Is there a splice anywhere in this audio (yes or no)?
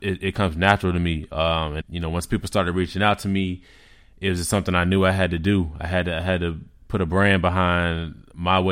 yes